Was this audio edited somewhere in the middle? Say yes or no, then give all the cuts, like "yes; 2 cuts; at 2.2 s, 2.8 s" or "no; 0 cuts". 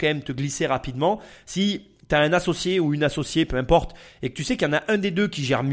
no; 0 cuts